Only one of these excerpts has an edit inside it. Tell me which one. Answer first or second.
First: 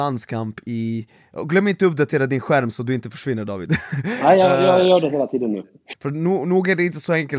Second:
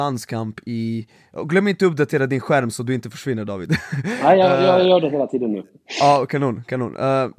first